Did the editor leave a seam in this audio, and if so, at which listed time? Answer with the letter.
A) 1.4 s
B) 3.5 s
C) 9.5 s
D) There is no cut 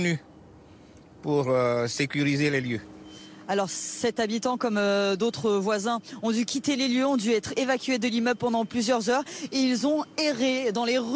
D